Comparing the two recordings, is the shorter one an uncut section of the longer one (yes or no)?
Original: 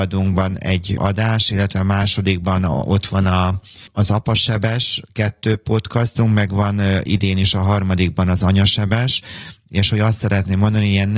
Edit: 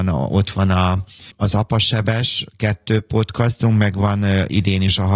yes